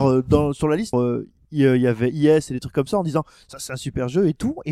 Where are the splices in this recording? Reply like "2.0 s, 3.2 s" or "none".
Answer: 0.9 s